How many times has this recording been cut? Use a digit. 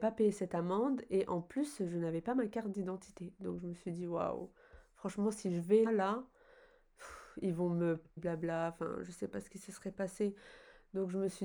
2